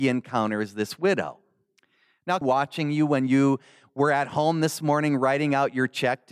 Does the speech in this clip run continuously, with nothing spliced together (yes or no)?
no